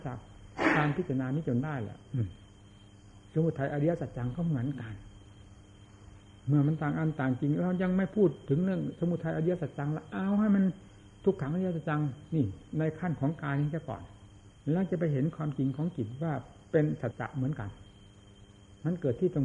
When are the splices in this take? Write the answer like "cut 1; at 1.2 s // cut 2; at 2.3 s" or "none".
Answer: cut 1; at 17.1 s